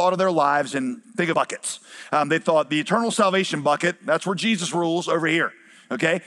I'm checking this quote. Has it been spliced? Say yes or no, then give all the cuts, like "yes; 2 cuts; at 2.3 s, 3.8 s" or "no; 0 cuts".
yes; 1 cut; at 1.3 s